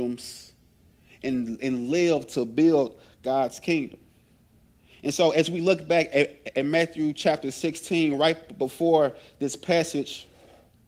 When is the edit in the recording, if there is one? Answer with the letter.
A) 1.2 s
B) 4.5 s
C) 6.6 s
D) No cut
D